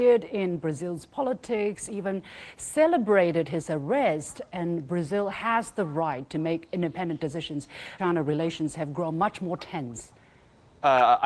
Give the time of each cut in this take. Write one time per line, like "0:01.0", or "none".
0:08.0